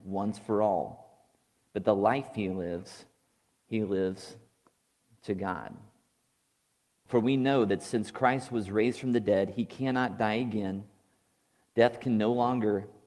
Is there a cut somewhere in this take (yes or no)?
yes